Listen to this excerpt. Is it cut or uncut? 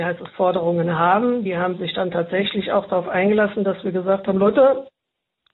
uncut